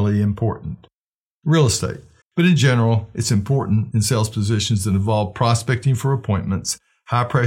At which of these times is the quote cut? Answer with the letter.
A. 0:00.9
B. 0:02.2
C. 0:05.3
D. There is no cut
B